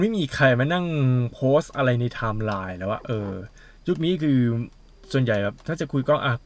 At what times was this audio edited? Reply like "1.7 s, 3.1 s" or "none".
none